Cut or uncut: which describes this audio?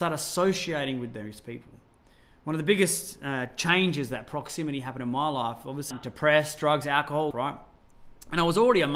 cut